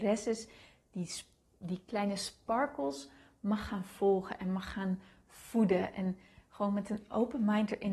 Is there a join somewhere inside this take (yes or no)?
no